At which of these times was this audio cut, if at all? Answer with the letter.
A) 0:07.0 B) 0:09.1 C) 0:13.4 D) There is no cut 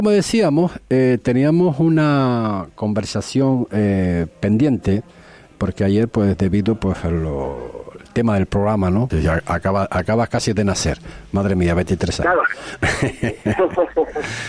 B